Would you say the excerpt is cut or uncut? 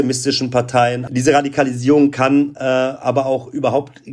uncut